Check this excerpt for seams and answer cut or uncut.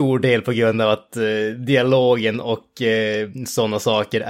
uncut